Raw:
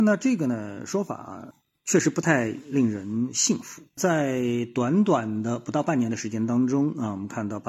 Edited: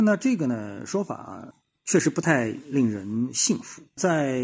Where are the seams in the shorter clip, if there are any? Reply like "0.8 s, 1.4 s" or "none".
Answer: none